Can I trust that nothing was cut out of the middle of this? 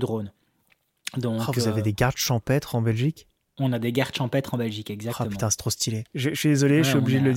no; 1 cut; at 6.1 s

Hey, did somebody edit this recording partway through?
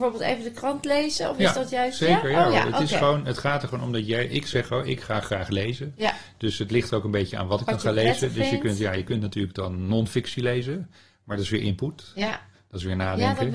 no; 0 cuts

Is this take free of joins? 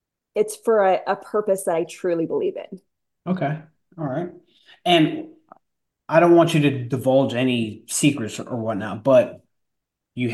yes; 0 cuts

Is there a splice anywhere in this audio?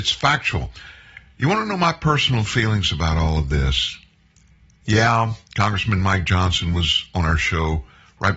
no; 0 cuts

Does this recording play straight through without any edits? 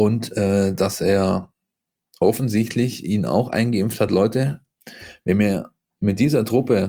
yes; 0 cuts

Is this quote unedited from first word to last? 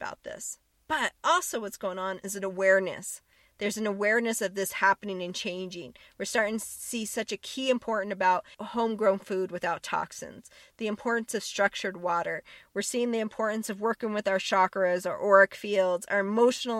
yes; 0 cuts

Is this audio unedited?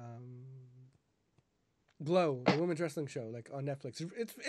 yes; 0 cuts

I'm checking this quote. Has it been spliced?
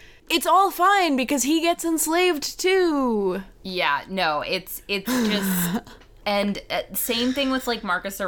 no; 0 cuts

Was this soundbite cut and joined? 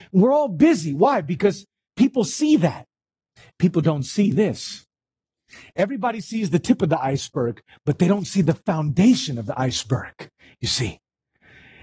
no; 0 cuts

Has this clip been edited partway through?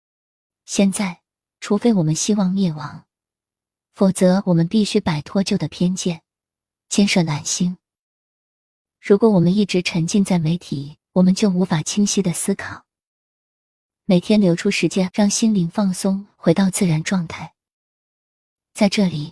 yes; 2 cuts; at 11.0 s, 15.1 s

